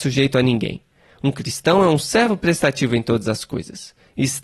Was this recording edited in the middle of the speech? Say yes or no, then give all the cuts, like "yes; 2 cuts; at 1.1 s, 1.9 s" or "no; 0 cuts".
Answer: no; 0 cuts